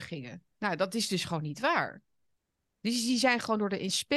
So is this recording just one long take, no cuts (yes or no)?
yes